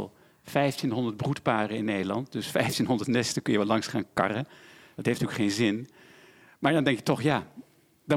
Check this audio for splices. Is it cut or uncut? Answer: uncut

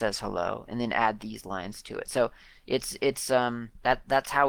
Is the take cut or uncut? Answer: uncut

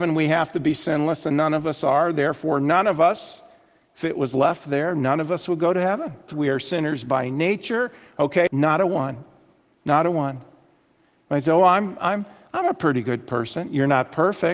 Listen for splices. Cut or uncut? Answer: cut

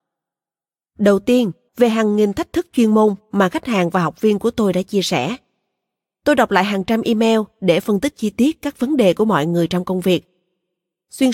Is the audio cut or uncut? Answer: cut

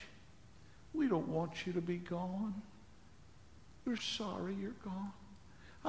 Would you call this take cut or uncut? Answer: cut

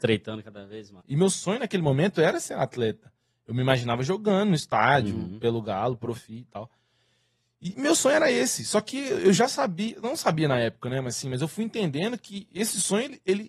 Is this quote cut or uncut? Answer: cut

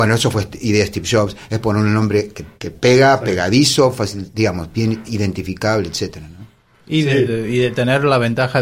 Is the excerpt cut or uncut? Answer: cut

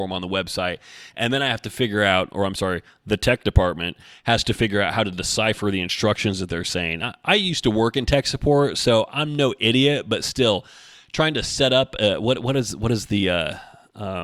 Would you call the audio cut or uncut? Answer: uncut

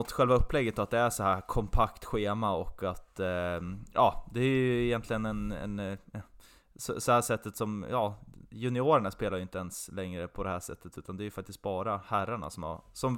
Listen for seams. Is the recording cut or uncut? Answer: uncut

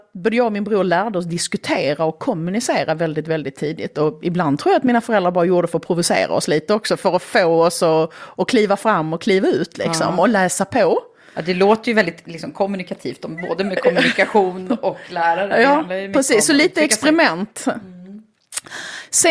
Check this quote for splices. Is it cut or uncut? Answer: uncut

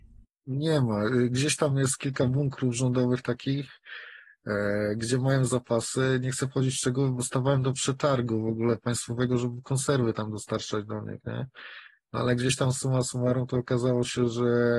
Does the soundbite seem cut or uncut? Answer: uncut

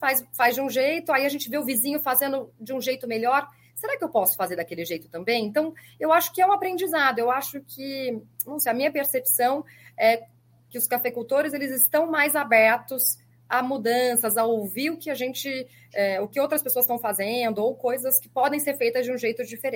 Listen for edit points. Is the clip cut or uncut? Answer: uncut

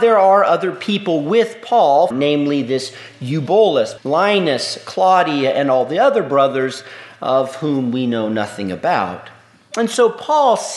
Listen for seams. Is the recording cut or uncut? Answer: cut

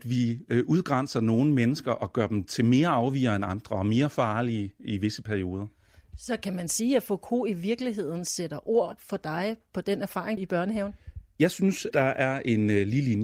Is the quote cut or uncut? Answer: cut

